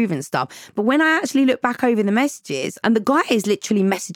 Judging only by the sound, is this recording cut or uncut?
uncut